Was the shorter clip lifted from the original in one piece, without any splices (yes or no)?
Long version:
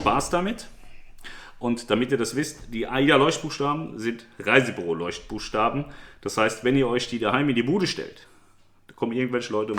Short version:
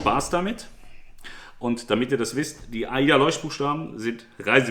yes